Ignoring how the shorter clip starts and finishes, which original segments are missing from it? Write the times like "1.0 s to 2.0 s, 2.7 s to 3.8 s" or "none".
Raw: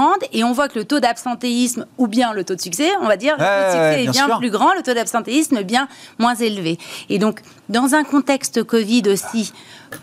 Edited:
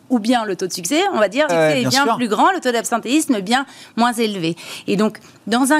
3.4 s to 3.7 s